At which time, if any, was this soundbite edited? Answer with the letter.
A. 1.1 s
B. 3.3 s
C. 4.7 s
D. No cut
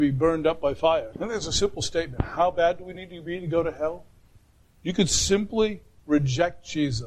A